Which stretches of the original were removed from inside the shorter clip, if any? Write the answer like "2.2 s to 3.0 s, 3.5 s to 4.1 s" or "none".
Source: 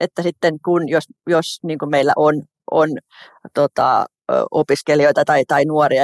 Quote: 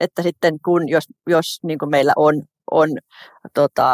none